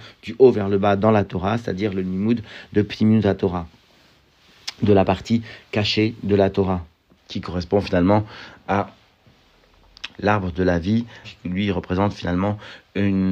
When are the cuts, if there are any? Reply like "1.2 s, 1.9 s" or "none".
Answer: 10.1 s, 11.2 s